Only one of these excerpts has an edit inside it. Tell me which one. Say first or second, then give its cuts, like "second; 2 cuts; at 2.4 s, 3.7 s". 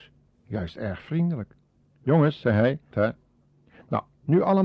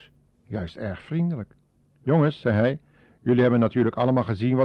first; 1 cut; at 2.9 s